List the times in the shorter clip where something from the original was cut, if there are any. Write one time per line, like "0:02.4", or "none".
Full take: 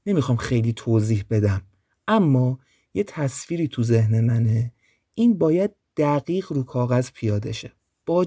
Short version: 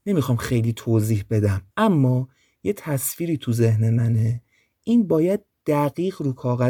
0:01.7